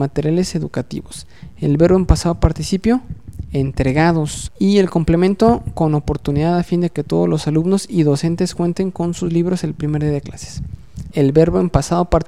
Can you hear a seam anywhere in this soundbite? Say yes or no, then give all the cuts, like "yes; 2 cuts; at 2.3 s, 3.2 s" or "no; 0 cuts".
yes; 2 cuts; at 4.5 s, 11.1 s